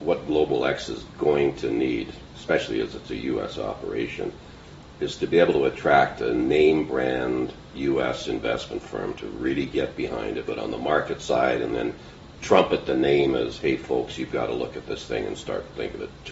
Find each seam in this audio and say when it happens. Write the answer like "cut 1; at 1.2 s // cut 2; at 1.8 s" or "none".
cut 1; at 10.5 s